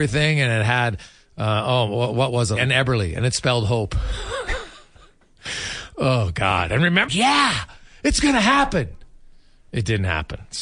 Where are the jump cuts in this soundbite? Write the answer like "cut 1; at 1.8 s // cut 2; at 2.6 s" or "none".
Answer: cut 1; at 2.6 s // cut 2; at 7.1 s